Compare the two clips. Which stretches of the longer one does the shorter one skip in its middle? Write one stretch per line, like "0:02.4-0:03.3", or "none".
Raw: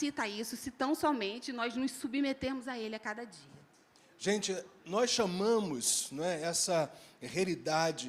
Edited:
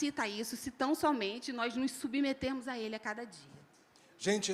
none